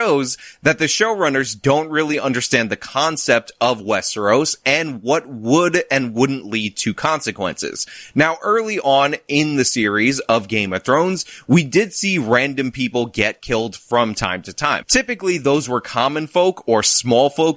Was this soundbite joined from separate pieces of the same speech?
yes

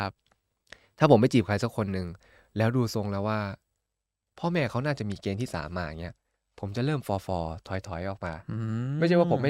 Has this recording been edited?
no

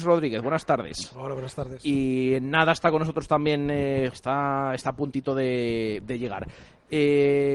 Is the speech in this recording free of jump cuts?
no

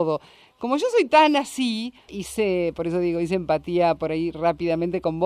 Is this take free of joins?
no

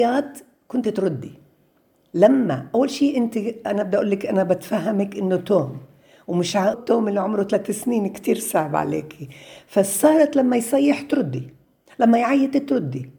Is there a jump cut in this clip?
yes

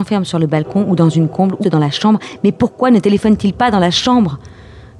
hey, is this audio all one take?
no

